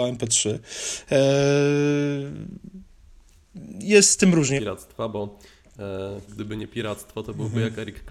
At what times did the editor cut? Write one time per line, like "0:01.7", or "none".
0:04.6
0:06.3